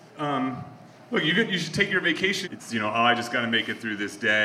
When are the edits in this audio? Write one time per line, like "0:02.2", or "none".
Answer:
0:02.4